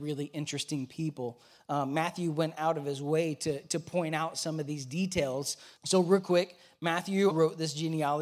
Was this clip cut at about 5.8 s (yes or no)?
yes